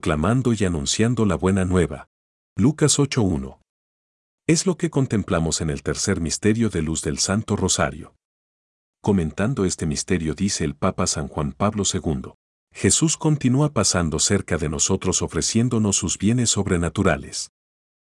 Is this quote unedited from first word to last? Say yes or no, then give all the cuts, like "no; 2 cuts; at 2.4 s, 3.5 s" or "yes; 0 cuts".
no; 1 cut; at 12.6 s